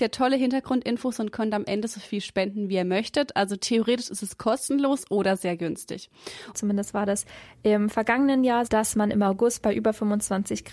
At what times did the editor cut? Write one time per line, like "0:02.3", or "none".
0:06.5
0:08.7